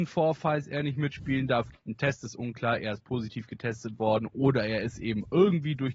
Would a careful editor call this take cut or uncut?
cut